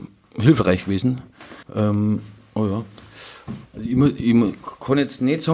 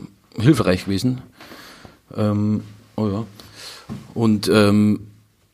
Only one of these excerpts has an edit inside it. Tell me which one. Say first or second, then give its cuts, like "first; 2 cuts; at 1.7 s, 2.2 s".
first; 2 cuts; at 1.6 s, 3.6 s